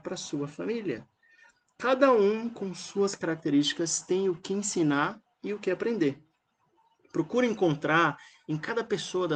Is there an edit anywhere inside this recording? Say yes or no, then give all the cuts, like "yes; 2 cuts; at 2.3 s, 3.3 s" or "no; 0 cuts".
no; 0 cuts